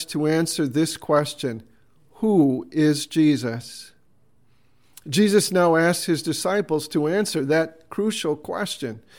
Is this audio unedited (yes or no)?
yes